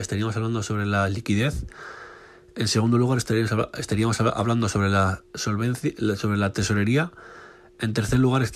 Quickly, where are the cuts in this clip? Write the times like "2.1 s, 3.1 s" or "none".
none